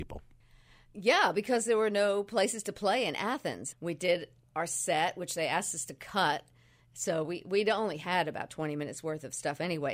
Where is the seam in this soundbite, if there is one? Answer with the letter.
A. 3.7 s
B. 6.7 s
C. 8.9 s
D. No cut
A